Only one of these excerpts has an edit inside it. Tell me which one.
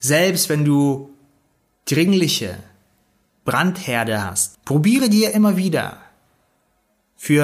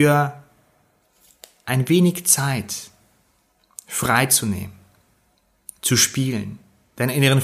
first; 1 cut; at 4.5 s

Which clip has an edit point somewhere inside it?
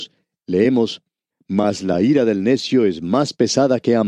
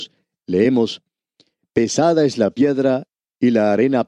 first; 1 cut; at 1.3 s

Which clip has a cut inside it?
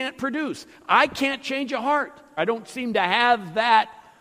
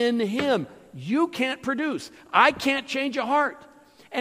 first; 1 cut; at 2.4 s

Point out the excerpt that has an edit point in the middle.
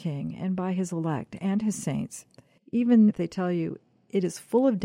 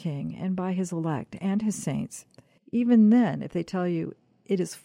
first; 1 cut; at 3.1 s

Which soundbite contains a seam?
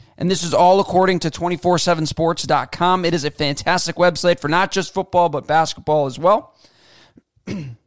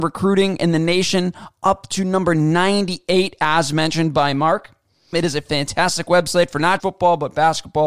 second; 2 cuts; at 5.1 s, 6.8 s

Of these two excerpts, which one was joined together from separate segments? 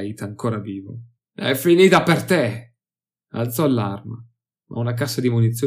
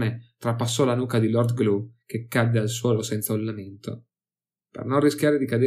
first; 1 cut; at 1.2 s

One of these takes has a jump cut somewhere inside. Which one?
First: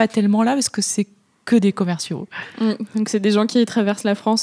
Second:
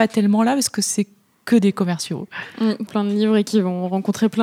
second; 1 cut; at 2.9 s

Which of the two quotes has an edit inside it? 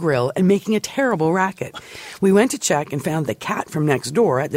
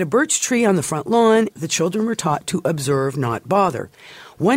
second; 1 cut; at 1.5 s

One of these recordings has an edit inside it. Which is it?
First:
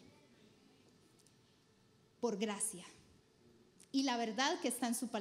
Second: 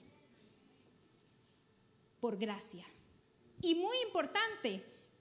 second; 1 cut; at 3.6 s

